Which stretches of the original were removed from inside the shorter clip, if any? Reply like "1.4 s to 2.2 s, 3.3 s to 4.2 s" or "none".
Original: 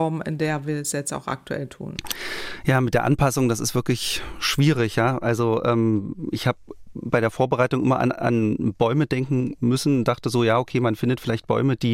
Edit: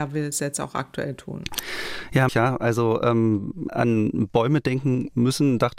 2.8 s to 4.9 s, 6.3 s to 8.1 s